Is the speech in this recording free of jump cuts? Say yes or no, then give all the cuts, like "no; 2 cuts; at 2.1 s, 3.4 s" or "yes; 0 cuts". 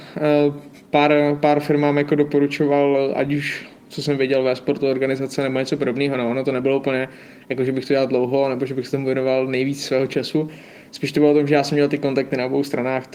yes; 0 cuts